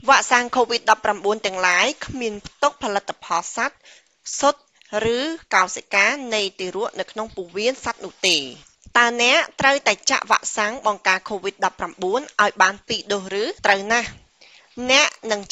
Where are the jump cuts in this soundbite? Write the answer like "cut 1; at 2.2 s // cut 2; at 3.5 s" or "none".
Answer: cut 1; at 13.6 s